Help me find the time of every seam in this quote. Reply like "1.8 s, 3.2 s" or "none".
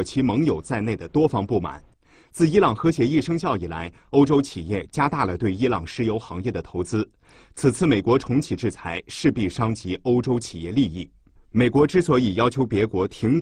11.4 s